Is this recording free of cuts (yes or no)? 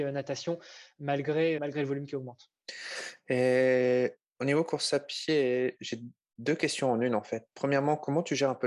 no